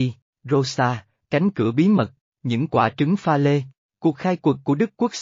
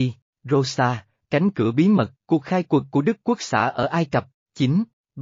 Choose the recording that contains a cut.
second; 1 cut; at 2.2 s

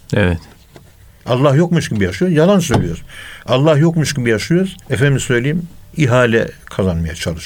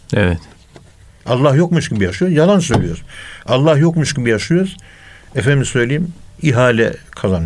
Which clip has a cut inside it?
first; 1 cut; at 4.8 s

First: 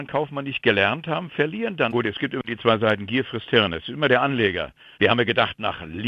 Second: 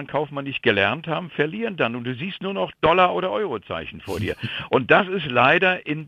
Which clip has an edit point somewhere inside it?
first; 2 cuts; at 1.9 s, 5.0 s

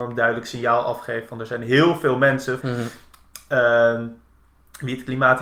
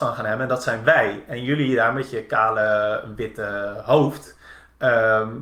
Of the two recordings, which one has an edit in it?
first; 1 cut; at 2.6 s

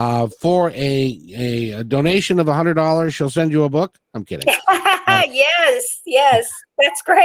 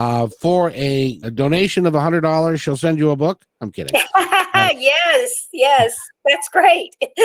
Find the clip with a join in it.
second; 1 cut; at 1.2 s

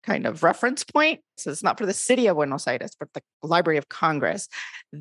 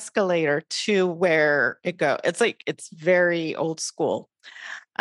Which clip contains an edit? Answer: first; 1 cut; at 1.4 s

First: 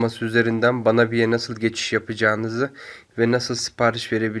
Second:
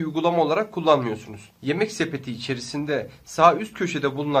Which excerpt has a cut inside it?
second; 1 cut; at 1.6 s

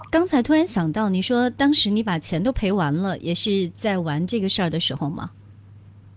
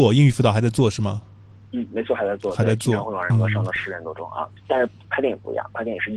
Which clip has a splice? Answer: second; 2 cuts; at 3.3 s, 4.6 s

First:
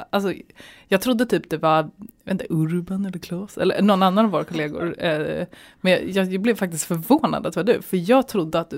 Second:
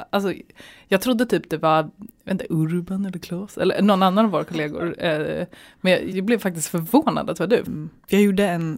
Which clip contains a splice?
second; 2 cuts; at 6.1 s, 7.7 s

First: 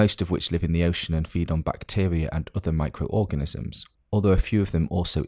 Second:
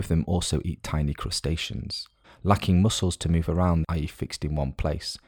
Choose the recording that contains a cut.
second; 2 cuts; at 2.2 s, 3.8 s

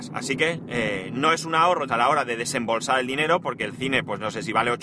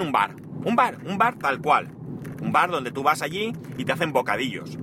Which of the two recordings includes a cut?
first; 1 cut; at 1.9 s

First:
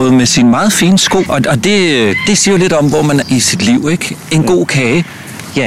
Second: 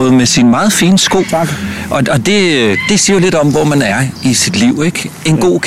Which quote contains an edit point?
first; 2 cuts; at 1.3 s, 3.2 s

